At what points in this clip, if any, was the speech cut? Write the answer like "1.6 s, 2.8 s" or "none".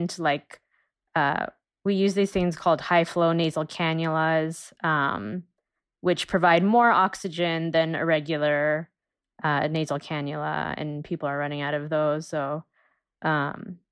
none